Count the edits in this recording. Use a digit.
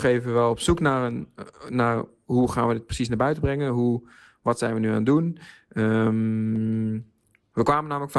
0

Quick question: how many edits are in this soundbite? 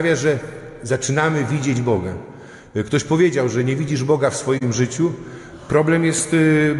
0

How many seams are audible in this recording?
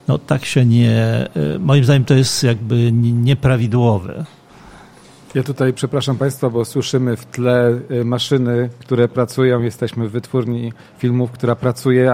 0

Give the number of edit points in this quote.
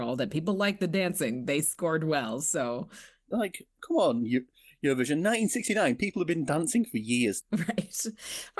2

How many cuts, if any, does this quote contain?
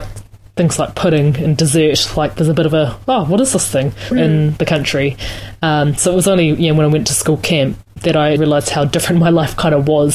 2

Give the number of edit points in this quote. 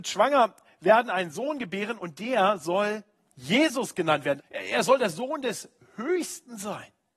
2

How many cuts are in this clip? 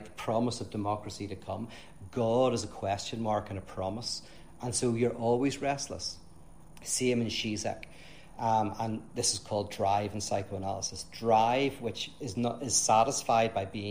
1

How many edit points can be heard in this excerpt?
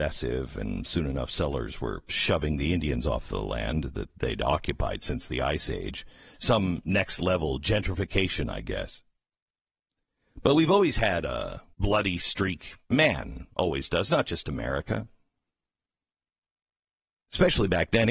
1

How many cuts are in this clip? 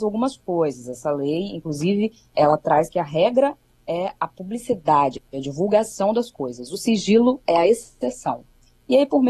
0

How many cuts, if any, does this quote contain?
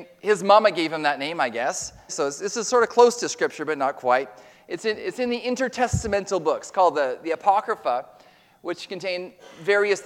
1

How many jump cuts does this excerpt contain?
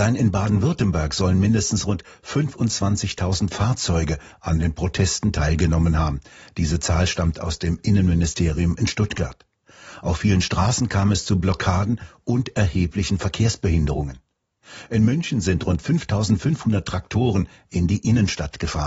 0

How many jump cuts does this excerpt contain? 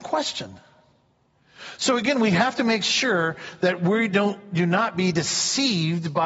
0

